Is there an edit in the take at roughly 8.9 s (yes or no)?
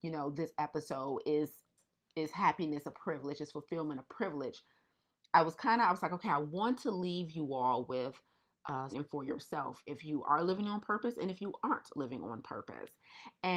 yes